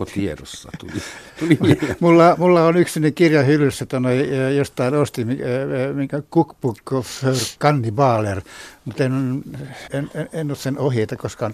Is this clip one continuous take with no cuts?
no; 1 cut; at 9.9 s

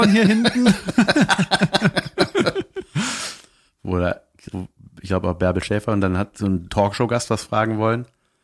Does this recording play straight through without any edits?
no; 1 cut; at 4.5 s

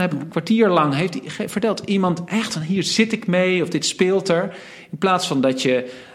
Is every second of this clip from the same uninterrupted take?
yes; 0 cuts

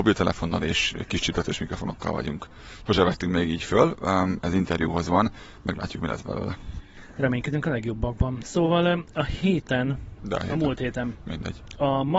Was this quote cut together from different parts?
yes; 1 cut; at 10.2 s

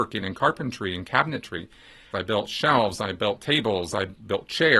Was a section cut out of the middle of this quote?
yes; 1 cut; at 2.1 s

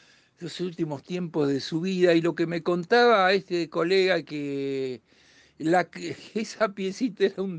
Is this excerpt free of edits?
yes; 0 cuts

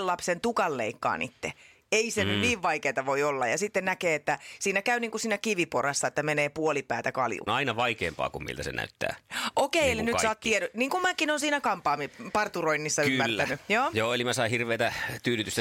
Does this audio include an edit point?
yes; 1 cut; at 7.5 s

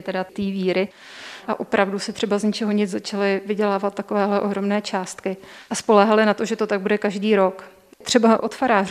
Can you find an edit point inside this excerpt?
yes; 1 cut; at 7.9 s

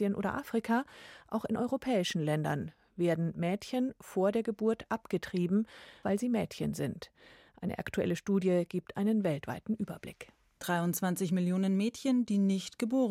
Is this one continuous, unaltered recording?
no; 2 cuts; at 6.0 s, 10.6 s

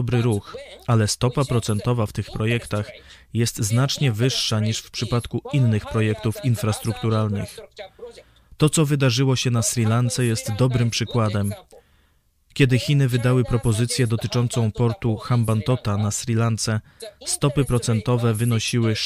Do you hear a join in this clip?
no; 0 cuts

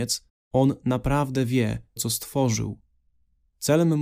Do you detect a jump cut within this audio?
yes; 1 cut; at 2.0 s

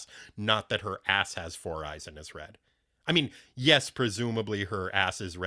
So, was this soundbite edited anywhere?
no; 0 cuts

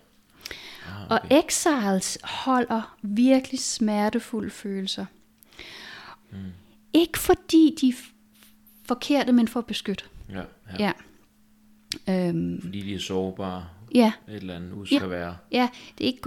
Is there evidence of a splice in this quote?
yes; 2 cuts; at 6.2 s, 14.9 s

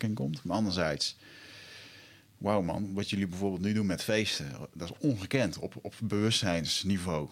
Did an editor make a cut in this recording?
no; 0 cuts

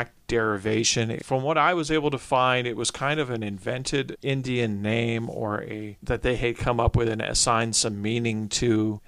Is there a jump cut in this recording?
no; 0 cuts

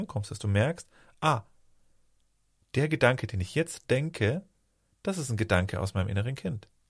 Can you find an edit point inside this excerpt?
no; 0 cuts

